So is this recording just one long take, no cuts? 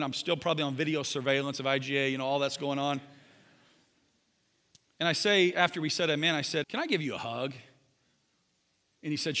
no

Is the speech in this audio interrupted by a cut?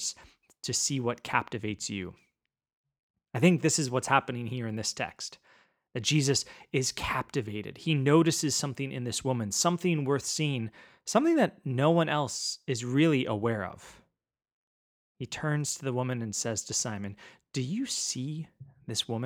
no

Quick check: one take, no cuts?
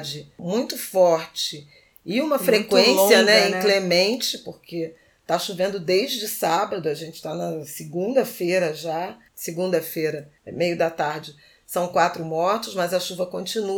no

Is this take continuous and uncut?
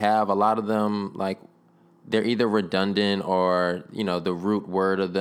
yes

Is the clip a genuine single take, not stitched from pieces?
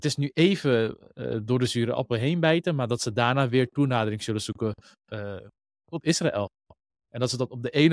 yes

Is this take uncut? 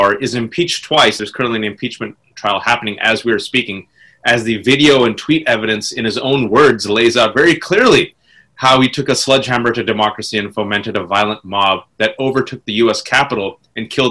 yes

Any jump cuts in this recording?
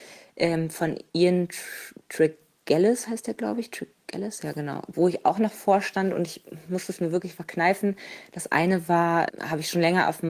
yes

